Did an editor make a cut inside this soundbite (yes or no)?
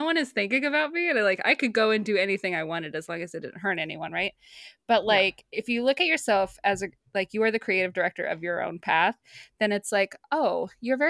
no